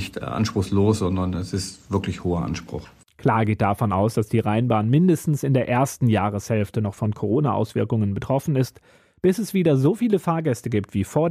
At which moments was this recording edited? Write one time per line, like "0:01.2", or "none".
none